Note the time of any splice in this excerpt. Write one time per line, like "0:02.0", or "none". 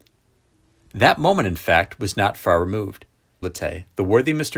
0:03.4